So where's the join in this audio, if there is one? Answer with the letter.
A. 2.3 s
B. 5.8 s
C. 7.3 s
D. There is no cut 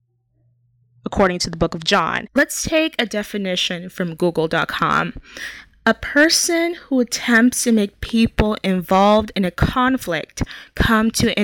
A